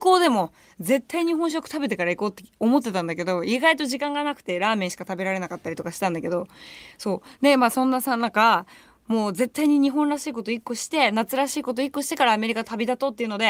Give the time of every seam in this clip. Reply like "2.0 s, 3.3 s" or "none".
none